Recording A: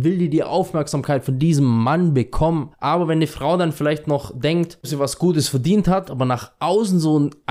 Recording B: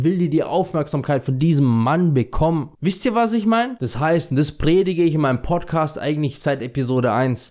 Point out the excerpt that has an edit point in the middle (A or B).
A